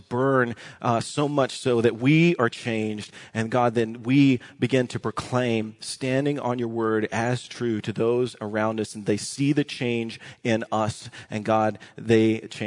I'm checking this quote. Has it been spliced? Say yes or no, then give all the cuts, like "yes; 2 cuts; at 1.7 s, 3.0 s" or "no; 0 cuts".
no; 0 cuts